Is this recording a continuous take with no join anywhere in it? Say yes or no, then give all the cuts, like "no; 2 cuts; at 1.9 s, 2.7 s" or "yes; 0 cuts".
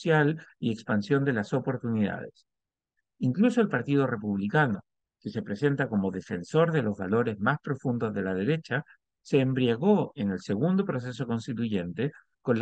yes; 0 cuts